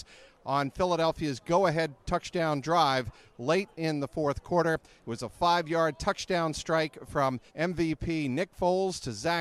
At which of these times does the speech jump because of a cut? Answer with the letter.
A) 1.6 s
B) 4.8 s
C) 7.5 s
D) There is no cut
C